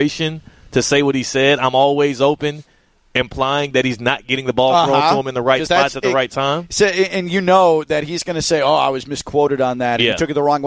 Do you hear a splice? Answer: no; 0 cuts

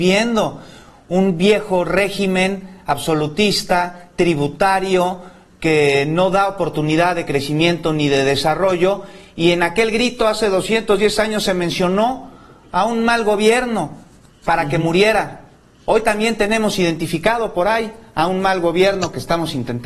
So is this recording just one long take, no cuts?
yes; 0 cuts

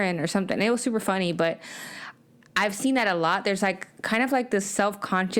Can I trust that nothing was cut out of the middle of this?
yes; 0 cuts

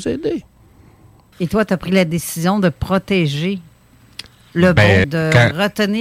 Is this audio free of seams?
no; 2 cuts; at 1.3 s, 5.0 s

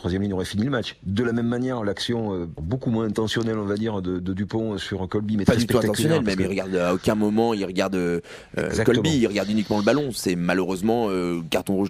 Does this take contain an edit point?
no; 0 cuts

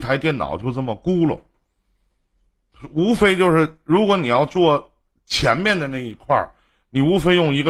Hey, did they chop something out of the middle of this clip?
no; 0 cuts

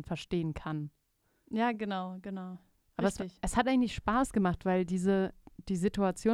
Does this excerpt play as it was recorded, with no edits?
yes; 0 cuts

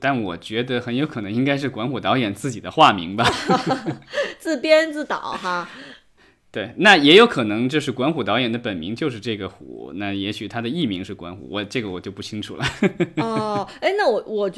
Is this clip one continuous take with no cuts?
yes; 0 cuts

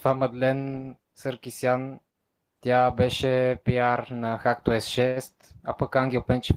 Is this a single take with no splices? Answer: no; 1 cut; at 1.0 s

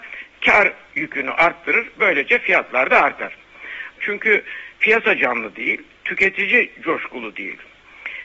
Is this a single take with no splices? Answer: no; 1 cut; at 4.0 s

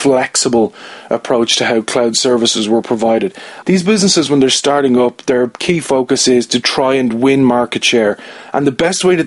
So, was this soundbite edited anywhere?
yes; 1 cut; at 3.6 s

